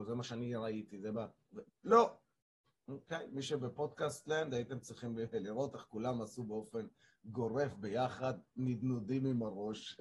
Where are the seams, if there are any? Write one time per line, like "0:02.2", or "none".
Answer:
0:01.7